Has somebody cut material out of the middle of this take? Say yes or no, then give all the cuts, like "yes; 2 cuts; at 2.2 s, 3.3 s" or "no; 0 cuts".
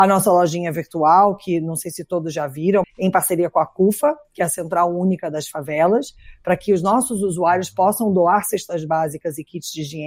yes; 1 cut; at 2.8 s